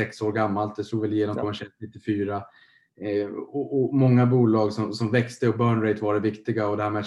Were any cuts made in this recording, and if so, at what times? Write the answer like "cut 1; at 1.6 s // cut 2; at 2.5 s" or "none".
none